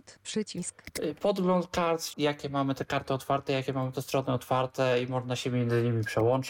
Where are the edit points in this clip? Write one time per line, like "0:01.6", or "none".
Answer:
0:02.1